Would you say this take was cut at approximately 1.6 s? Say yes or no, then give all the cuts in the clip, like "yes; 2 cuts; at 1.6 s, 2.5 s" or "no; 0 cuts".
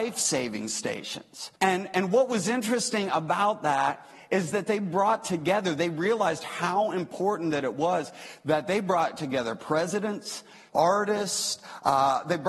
yes; 2 cuts; at 1.6 s, 10.7 s